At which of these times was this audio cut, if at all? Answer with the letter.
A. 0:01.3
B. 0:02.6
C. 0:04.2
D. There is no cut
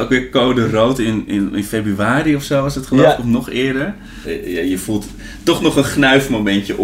C